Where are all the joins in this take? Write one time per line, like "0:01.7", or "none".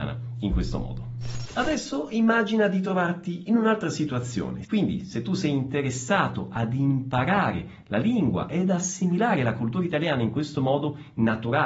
0:04.6